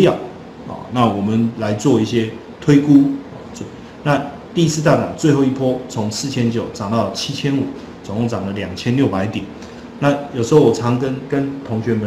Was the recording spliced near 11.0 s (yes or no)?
no